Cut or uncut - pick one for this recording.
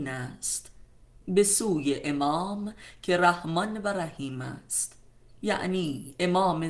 uncut